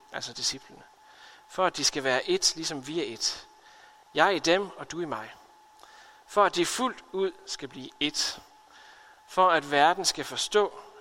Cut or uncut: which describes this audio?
uncut